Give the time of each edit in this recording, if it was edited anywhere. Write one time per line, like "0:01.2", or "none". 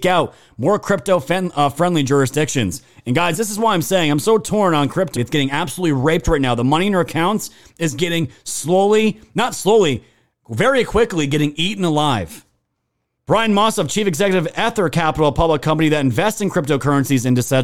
0:05.2
0:13.2